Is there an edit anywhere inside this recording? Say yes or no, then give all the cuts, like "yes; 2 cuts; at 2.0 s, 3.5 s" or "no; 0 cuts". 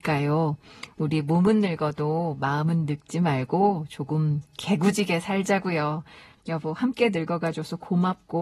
yes; 1 cut; at 6.4 s